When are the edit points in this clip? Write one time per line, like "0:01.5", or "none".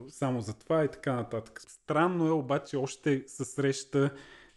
0:01.6